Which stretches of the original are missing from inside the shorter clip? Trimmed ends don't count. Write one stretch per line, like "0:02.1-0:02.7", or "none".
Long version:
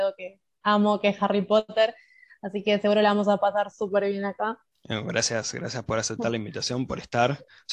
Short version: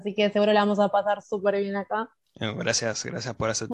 none